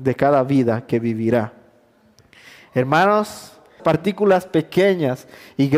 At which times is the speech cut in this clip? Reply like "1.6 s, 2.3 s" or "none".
3.8 s